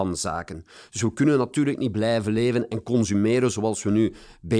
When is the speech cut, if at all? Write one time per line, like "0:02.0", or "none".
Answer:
none